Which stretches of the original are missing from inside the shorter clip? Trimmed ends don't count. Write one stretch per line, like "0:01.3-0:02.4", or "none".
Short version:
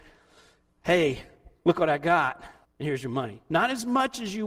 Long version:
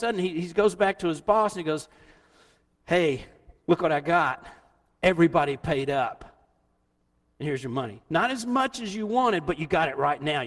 0:04.7-0:07.2